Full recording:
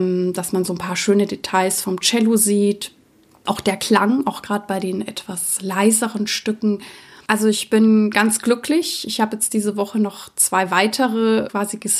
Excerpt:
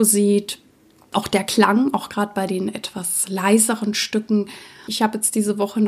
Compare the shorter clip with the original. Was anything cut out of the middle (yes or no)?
yes